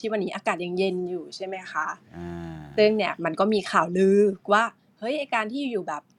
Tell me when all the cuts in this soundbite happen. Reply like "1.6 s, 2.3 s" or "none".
none